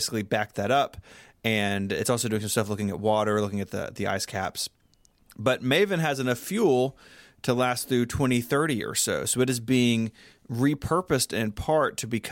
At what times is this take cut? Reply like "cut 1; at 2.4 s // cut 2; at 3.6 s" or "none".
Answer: none

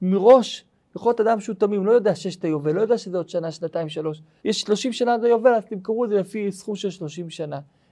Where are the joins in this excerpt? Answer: cut 1; at 4.4 s

